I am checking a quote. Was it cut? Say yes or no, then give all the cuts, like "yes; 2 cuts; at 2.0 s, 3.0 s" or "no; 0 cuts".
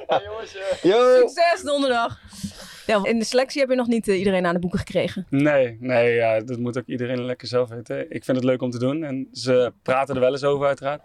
yes; 1 cut; at 3.0 s